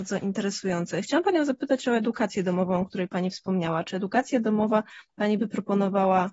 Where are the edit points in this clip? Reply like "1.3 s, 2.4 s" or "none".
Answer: none